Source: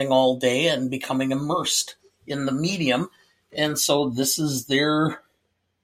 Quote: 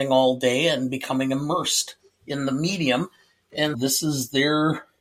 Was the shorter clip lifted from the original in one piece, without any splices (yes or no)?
no